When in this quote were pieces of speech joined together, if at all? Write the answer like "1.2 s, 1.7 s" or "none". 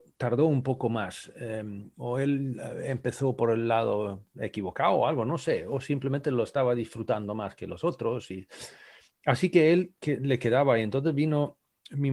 none